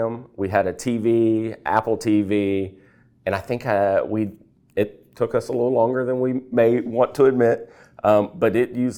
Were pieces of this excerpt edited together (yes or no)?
no